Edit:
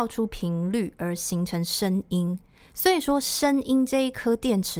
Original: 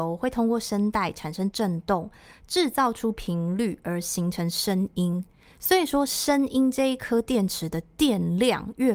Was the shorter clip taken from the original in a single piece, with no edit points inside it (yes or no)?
yes